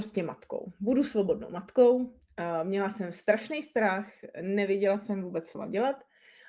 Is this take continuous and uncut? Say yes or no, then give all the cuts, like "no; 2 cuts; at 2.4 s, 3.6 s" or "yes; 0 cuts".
yes; 0 cuts